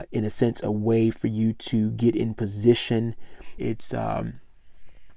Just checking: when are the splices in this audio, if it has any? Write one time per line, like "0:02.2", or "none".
0:03.6